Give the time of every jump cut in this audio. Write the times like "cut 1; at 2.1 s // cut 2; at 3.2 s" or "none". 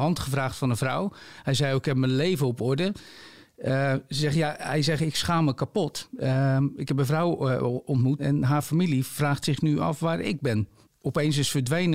cut 1; at 8.2 s // cut 2; at 10.9 s